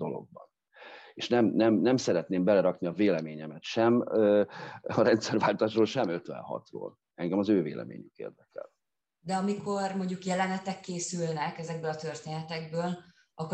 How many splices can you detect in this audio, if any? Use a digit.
0